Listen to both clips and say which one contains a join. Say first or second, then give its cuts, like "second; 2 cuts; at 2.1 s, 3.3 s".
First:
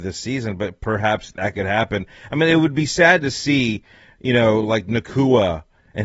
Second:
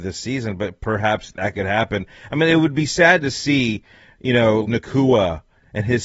second; 1 cut; at 4.6 s